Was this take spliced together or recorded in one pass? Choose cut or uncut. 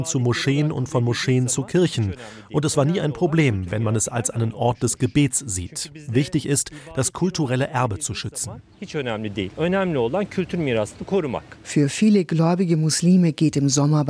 cut